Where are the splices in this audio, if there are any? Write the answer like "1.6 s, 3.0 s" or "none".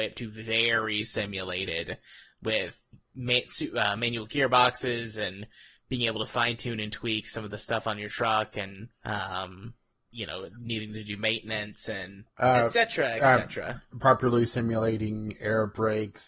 8.9 s